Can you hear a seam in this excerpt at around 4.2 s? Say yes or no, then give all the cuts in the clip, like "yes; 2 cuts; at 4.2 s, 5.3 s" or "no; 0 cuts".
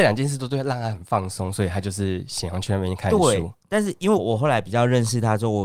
yes; 1 cut; at 4.2 s